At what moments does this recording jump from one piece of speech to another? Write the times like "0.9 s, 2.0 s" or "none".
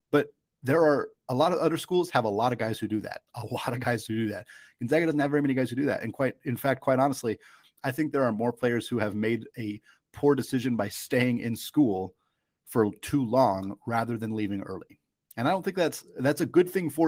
none